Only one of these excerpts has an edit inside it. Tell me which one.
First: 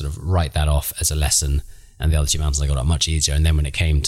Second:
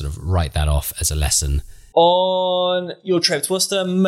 second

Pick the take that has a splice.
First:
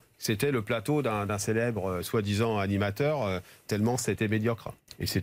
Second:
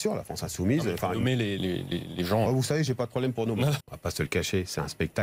second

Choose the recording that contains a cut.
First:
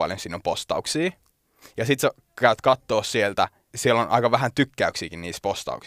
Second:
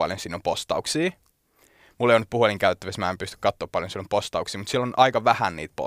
first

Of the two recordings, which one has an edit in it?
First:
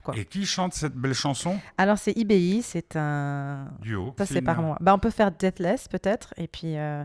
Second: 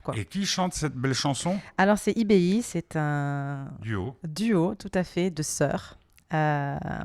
first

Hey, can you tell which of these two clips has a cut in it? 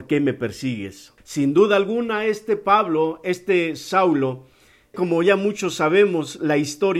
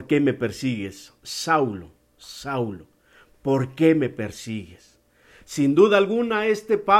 first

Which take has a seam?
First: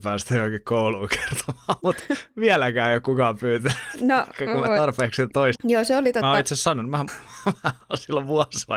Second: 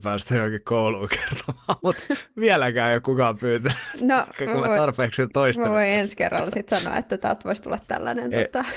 first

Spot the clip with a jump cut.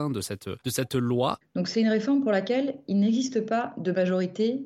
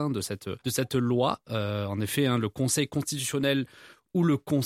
first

